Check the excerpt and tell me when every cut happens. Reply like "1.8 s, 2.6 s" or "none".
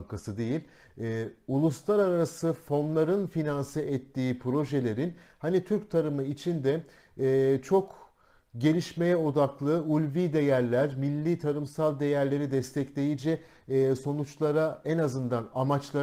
none